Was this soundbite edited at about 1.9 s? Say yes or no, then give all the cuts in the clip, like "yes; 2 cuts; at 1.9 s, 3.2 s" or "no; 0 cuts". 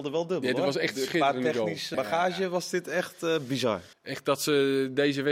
yes; 2 cuts; at 1.9 s, 3.9 s